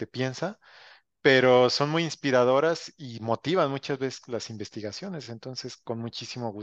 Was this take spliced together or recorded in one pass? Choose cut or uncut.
uncut